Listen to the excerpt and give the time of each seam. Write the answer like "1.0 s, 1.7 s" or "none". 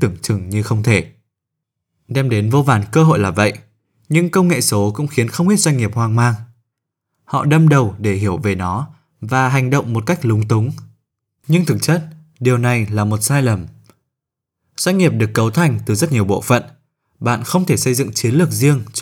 11.4 s

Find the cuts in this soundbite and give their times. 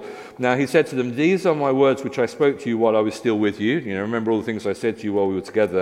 none

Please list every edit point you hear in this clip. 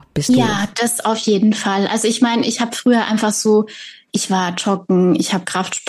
none

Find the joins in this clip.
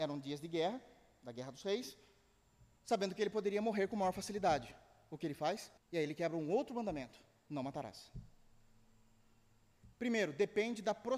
5.8 s, 9.9 s

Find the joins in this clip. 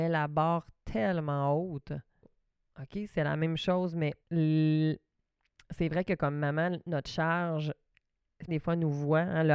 2.2 s, 4.2 s, 8.5 s

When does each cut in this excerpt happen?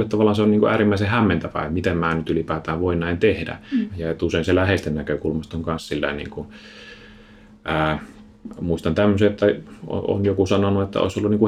3.9 s

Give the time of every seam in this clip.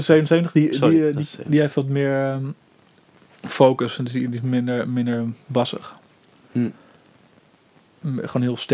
none

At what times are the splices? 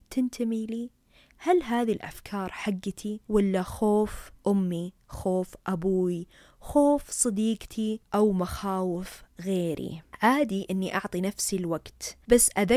4.4 s

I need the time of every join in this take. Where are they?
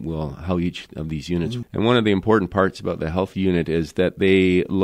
1.6 s

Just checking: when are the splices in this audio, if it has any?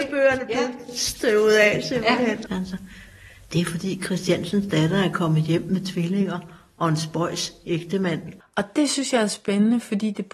2.5 s, 8.4 s

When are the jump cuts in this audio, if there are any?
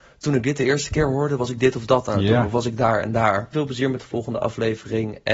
3.5 s

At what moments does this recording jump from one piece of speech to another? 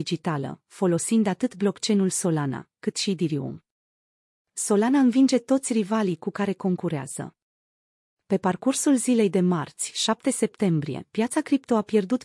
none

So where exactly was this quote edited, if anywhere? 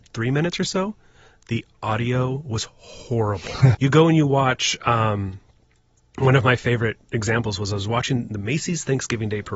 3.7 s

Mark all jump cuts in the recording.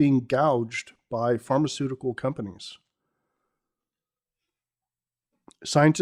none

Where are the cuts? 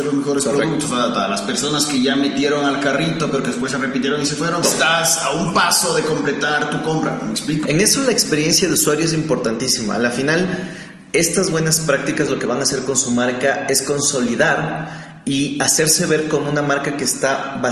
4.6 s, 7.6 s

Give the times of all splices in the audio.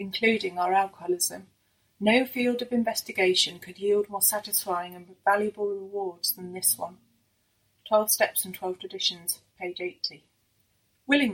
none

